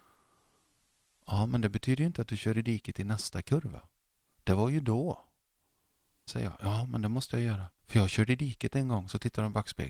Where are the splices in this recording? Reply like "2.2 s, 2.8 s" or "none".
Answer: 6.3 s, 7.8 s